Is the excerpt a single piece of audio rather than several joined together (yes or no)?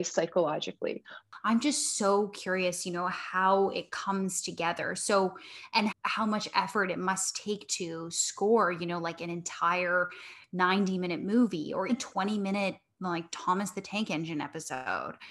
no